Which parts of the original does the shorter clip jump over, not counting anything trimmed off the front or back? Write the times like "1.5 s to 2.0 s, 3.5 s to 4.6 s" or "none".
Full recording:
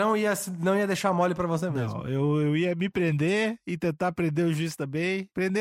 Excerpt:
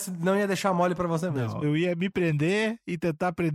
2.0 s to 2.4 s